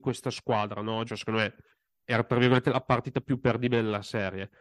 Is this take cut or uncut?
cut